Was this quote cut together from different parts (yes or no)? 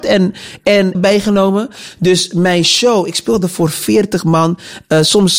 yes